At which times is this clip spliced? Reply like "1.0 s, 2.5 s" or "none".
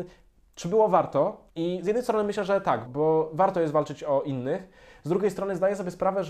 1.5 s, 2.9 s